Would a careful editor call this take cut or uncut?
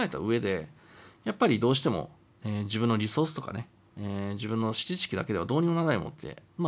uncut